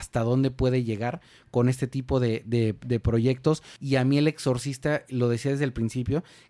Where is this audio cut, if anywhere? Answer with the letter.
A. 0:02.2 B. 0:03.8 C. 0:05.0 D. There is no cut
B